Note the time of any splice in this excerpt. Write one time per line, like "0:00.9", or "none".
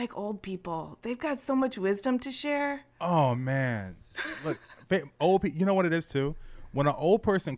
none